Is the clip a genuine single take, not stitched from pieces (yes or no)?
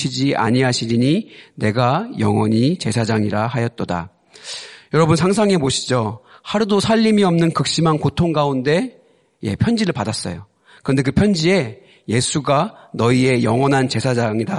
yes